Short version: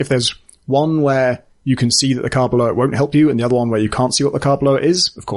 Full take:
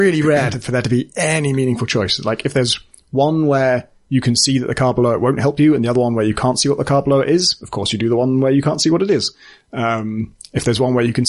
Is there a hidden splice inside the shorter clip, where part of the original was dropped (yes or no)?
no